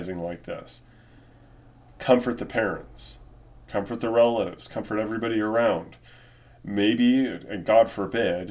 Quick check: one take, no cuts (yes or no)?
yes